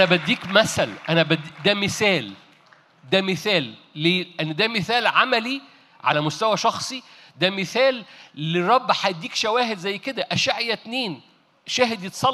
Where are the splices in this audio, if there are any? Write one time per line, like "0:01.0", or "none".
none